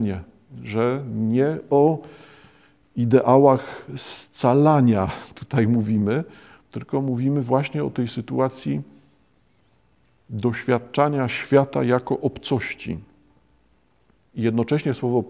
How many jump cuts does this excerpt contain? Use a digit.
1